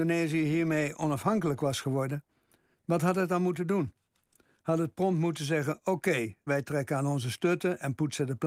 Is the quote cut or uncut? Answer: cut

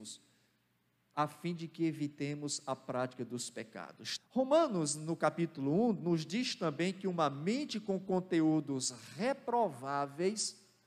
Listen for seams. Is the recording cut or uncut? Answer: cut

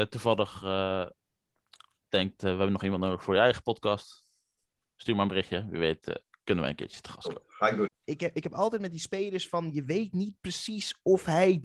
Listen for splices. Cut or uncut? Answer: cut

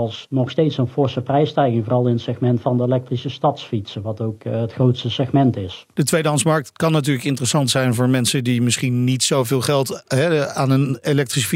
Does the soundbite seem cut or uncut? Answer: uncut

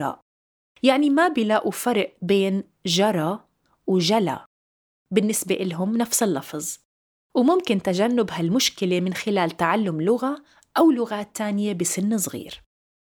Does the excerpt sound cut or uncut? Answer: uncut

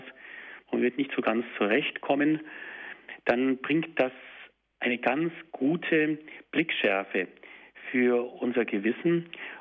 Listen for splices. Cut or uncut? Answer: uncut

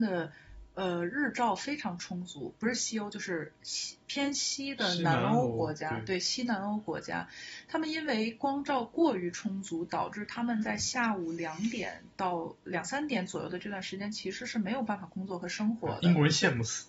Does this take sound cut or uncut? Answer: uncut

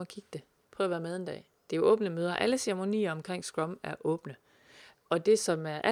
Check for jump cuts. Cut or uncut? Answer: uncut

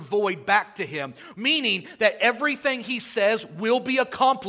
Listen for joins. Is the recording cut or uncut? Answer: uncut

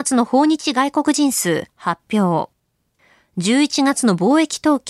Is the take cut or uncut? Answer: uncut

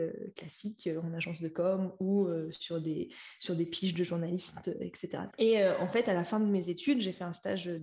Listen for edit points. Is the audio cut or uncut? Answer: cut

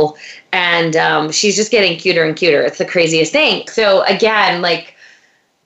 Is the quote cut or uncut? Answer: cut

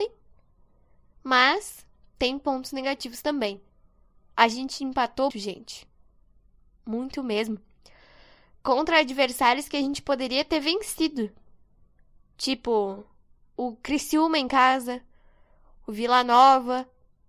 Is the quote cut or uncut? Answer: cut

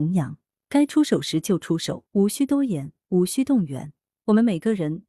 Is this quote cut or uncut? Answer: cut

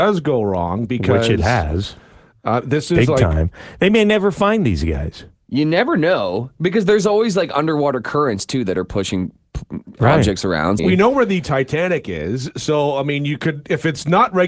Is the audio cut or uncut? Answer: cut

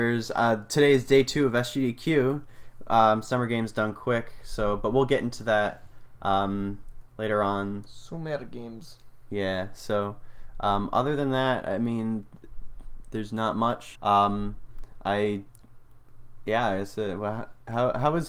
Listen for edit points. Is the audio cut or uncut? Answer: cut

